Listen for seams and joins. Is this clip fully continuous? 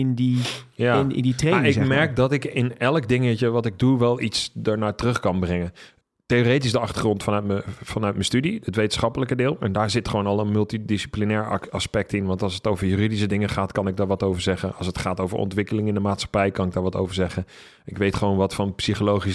yes; 0 cuts

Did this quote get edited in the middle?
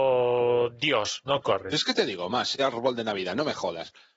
yes; 2 cuts; at 1.2 s, 2.6 s

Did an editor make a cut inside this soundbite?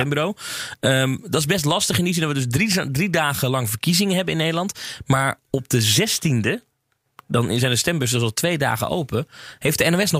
no; 0 cuts

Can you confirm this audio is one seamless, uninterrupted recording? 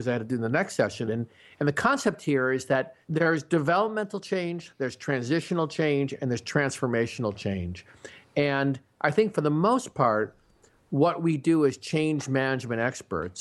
no; 2 cuts; at 1.1 s, 3.0 s

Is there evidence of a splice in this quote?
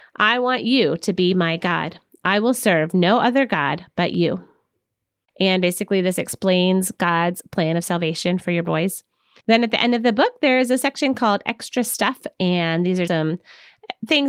yes; 3 cuts; at 5.3 s, 9.4 s, 13.1 s

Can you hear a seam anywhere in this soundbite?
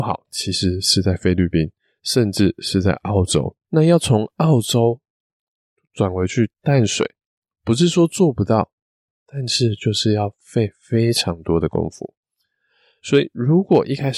yes; 1 cut; at 3.6 s

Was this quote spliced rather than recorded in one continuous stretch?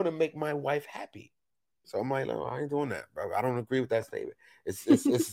yes; 1 cut; at 1.8 s

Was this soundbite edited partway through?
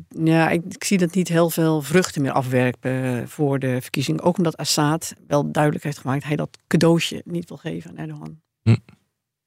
yes; 1 cut; at 5.2 s

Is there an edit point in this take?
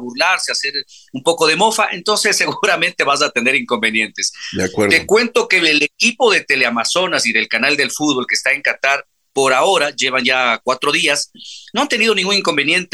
no; 0 cuts

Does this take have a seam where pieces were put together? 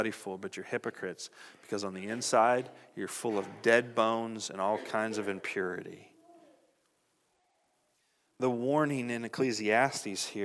no; 0 cuts

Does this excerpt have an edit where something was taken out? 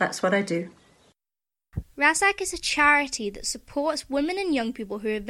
yes; 1 cut; at 1.8 s

